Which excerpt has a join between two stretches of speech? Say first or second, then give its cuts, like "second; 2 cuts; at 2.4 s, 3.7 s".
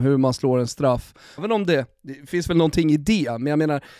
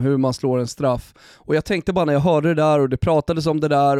first; 1 cut; at 1.4 s